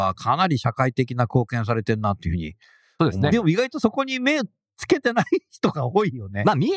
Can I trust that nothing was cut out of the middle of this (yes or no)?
no